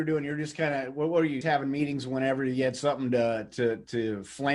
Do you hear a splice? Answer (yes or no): yes